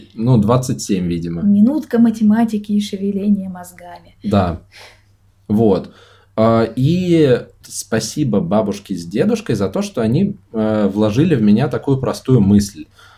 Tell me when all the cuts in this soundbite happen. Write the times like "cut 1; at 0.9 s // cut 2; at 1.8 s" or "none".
cut 1; at 7.6 s